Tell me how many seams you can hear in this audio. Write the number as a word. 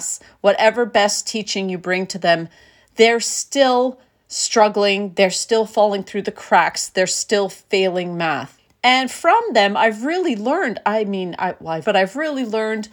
two